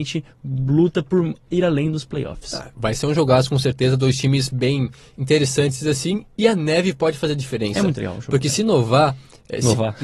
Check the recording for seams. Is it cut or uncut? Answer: uncut